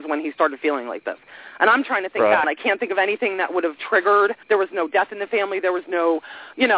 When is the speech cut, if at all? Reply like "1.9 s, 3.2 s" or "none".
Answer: 2.4 s, 4.4 s